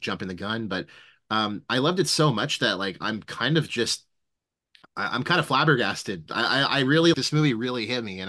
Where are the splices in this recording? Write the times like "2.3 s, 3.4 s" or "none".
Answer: 7.1 s

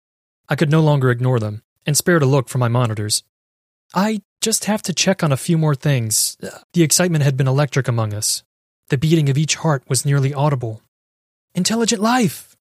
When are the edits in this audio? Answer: 6.6 s

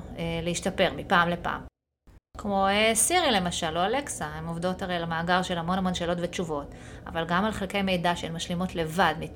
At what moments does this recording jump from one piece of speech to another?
2.2 s

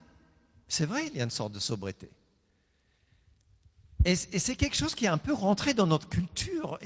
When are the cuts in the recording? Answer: none

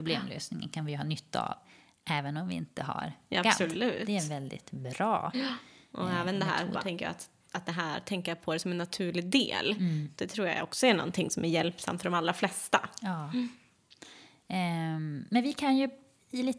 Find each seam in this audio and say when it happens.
6.8 s, 10.2 s

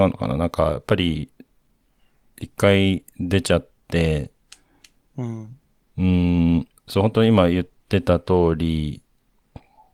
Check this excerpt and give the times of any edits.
6.8 s

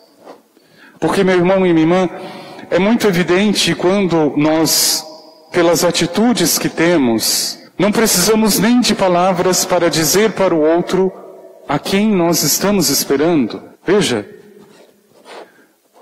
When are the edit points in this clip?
7.7 s, 13.7 s

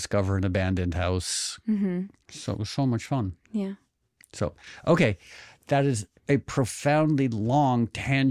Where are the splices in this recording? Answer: none

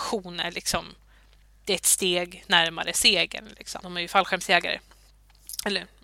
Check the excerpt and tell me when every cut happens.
3.8 s

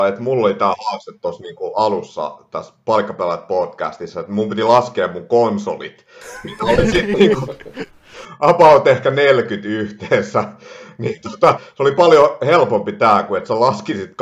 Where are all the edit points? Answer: 11.5 s

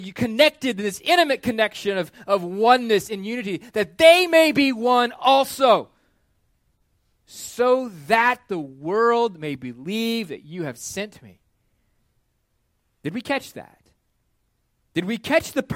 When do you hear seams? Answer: none

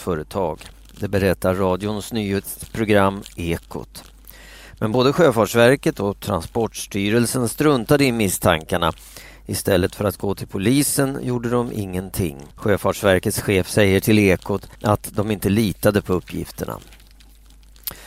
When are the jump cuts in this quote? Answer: 12.5 s, 14.7 s

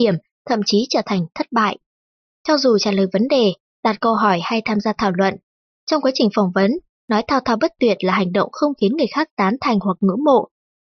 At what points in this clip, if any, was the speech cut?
none

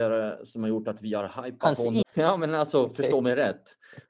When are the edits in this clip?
2.0 s

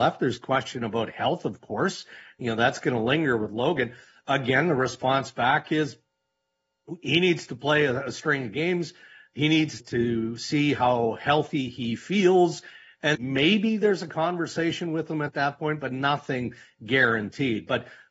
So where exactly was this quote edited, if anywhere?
9.8 s, 13.1 s

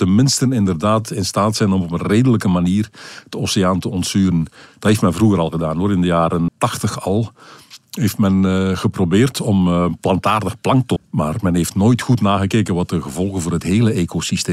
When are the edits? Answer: 6.5 s, 11.0 s

